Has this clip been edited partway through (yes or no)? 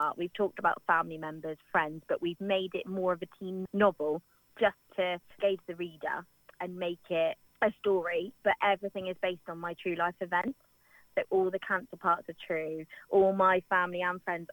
no